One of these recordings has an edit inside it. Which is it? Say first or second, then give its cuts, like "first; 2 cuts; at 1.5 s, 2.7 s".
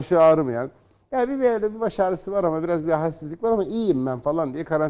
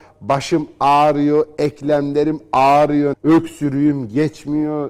second; 1 cut; at 3.1 s